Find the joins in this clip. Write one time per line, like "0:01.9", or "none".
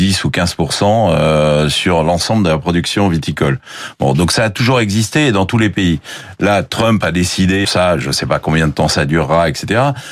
0:07.6